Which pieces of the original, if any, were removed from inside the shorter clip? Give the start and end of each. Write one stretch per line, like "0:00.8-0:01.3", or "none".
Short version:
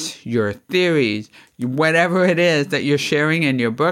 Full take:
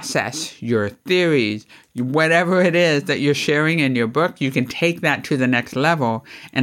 none